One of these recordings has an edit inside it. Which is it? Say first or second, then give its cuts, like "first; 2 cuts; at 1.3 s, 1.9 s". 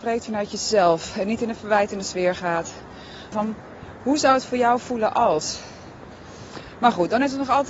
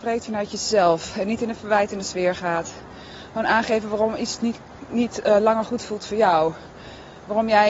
first; 1 cut; at 3.3 s